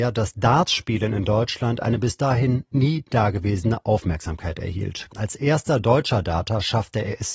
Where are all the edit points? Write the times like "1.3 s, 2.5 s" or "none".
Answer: 5.1 s